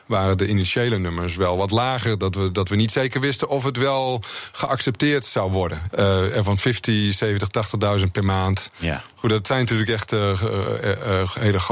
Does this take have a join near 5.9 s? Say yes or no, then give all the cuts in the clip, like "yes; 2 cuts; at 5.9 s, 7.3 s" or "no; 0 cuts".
yes; 1 cut; at 5.9 s